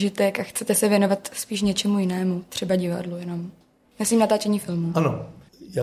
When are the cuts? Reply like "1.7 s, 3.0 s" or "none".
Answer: none